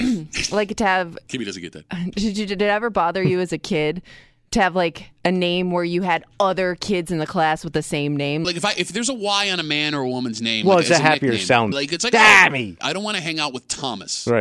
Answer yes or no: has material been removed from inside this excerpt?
yes